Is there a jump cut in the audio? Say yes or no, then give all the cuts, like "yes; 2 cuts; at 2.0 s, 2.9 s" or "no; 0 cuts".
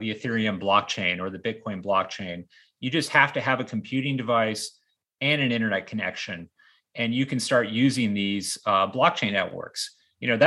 no; 0 cuts